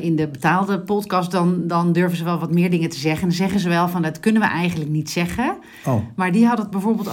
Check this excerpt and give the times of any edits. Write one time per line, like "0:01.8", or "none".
none